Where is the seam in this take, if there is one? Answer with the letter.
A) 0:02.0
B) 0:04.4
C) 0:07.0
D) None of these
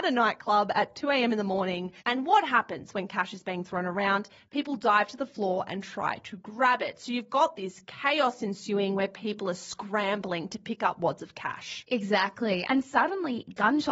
A